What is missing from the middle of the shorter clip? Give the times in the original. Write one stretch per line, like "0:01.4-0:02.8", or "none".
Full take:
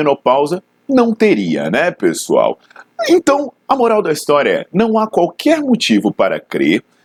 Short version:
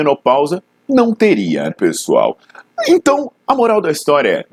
0:01.7-0:01.9